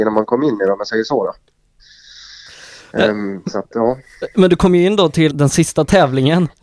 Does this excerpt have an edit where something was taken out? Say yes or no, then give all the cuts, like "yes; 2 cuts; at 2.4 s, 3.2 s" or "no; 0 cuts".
yes; 1 cut; at 5.3 s